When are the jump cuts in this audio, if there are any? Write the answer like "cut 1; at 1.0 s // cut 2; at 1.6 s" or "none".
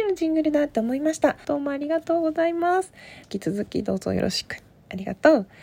cut 1; at 1.4 s // cut 2; at 3.2 s